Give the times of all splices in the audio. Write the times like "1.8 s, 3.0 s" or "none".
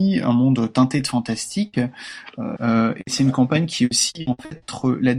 2.5 s